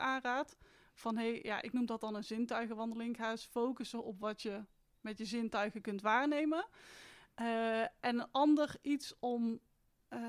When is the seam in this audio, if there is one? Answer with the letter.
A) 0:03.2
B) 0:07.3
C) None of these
C